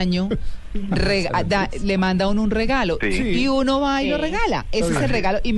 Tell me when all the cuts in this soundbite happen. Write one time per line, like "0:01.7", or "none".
0:03.0

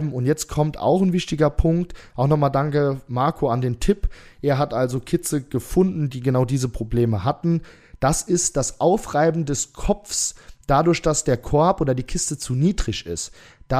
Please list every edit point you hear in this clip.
none

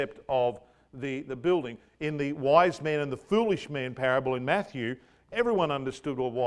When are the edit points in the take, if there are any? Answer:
none

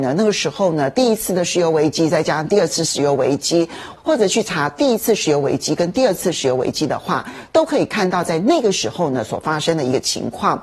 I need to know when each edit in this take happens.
0:04.0

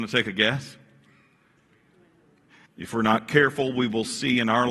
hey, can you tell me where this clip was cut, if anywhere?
0:02.7

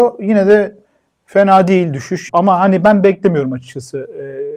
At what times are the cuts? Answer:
0:02.3

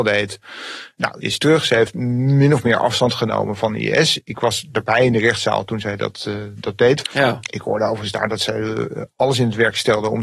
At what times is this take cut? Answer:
0:01.2
0:07.0

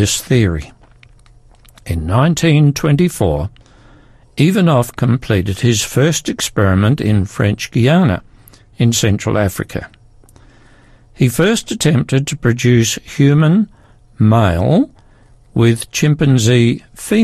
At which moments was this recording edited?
none

